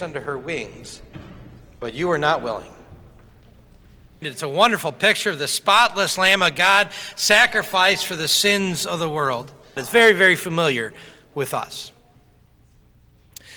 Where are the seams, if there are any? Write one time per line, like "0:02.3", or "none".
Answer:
0:04.2
0:09.8